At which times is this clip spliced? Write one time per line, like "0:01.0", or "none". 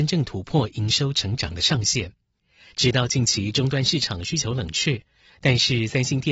0:05.3

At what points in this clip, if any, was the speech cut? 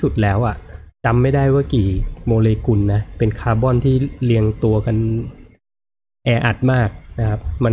none

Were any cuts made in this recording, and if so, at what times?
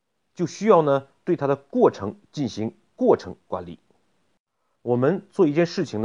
0:04.8

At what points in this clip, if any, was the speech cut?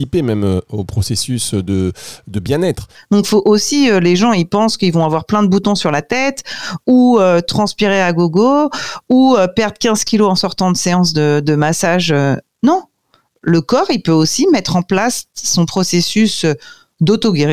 0:02.9

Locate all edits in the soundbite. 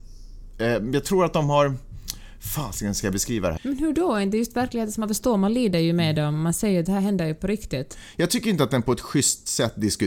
0:03.6

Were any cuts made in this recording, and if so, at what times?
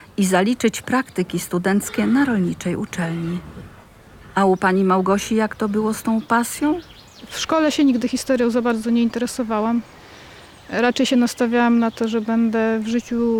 none

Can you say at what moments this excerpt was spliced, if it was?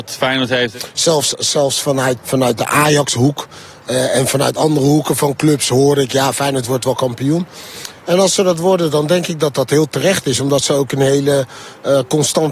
0:02.2

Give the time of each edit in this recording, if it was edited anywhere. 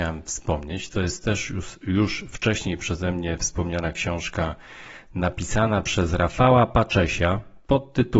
none

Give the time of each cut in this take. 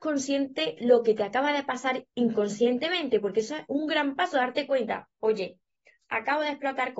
none

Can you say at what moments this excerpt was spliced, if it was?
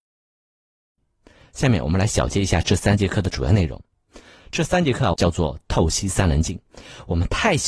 0:05.1

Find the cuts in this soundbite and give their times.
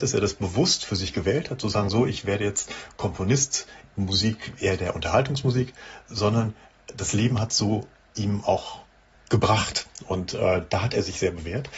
0:03.8

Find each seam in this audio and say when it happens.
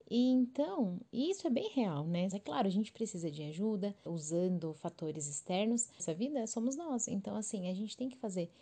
0:02.3
0:04.1
0:06.0

